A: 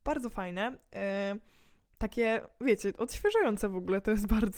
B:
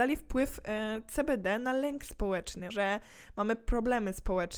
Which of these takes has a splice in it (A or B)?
B